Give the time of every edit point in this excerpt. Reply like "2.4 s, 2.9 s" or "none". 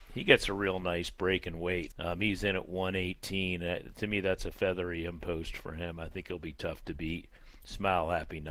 1.9 s

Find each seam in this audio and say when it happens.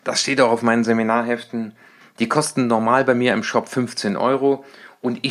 2.0 s

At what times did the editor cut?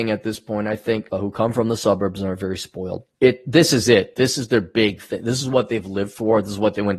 1.1 s, 3.1 s

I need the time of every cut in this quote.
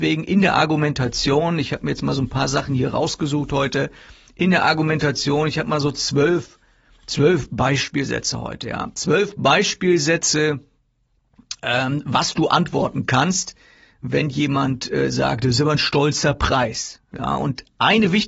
none

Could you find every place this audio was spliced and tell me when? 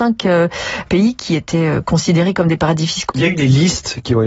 3.1 s

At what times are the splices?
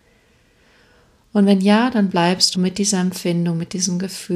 2.5 s

